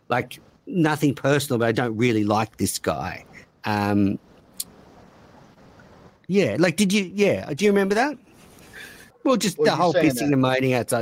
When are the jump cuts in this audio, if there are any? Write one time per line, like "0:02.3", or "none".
0:09.1